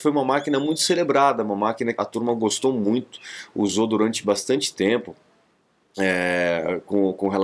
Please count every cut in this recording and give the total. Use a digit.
1